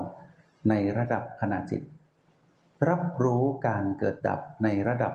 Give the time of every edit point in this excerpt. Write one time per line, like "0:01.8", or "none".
0:04.2

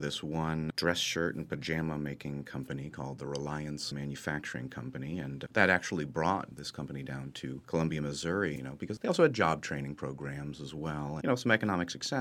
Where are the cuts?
0:08.6
0:11.2

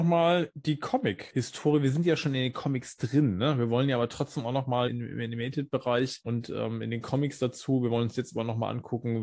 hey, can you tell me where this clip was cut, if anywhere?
0:04.9

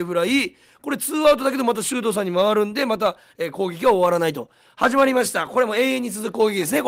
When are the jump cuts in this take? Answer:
none

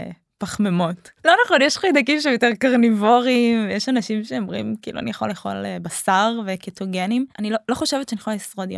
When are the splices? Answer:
0:01.2
0:07.3

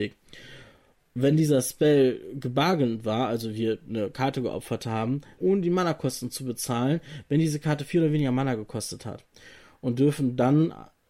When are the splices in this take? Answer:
0:05.4

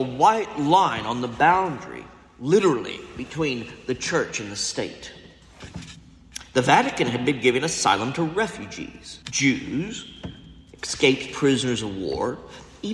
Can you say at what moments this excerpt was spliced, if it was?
0:09.2

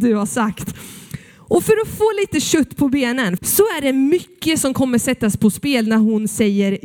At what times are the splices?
0:03.4

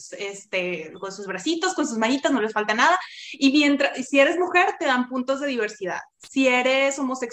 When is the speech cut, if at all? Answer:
none

